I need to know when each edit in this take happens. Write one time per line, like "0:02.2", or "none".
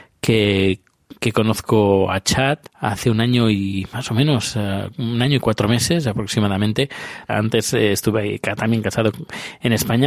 0:02.7
0:07.3